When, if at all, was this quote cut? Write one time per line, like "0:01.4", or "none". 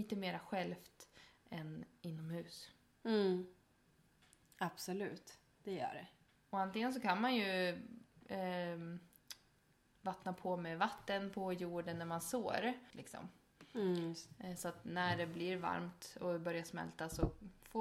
0:12.9